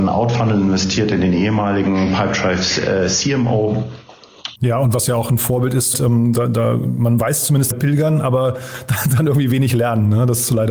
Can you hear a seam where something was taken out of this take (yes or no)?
yes